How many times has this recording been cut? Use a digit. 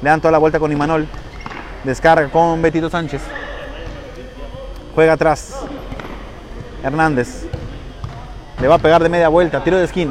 1